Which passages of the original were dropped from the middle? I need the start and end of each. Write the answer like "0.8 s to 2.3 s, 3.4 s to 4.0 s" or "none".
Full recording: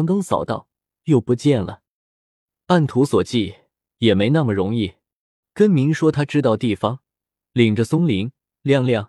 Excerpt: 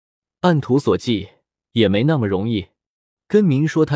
none